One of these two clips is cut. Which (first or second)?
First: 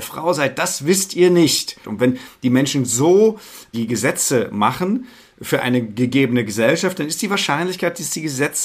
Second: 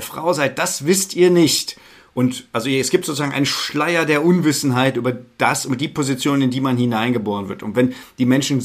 first